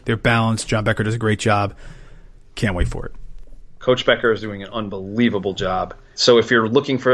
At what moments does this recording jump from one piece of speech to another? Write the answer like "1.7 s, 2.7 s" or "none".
none